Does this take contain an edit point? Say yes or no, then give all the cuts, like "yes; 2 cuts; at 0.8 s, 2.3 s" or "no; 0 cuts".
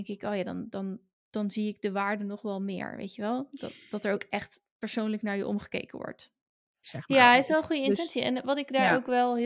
yes; 1 cut; at 6.8 s